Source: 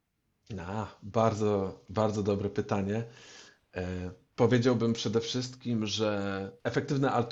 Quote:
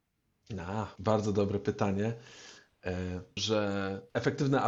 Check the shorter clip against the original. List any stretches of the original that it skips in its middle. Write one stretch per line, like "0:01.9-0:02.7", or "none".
0:01.0-0:01.9
0:04.3-0:05.9

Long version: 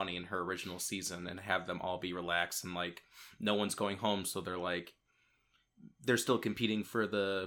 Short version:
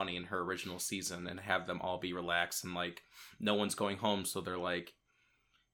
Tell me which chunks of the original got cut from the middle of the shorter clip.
none

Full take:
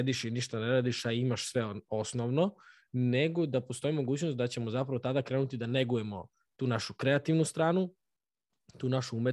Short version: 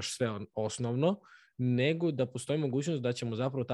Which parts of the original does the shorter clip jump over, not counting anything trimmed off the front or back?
none

